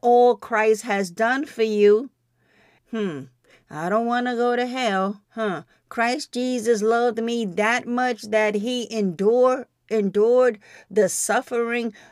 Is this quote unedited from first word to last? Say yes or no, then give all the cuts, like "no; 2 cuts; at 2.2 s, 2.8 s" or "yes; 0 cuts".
no; 2 cuts; at 2.8 s, 5.2 s